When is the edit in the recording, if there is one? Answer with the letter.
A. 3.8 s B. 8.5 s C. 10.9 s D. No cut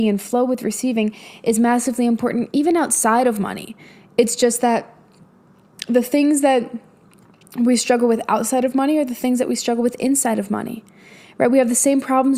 D